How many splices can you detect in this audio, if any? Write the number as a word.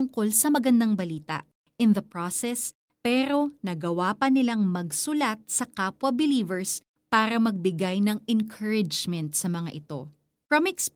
one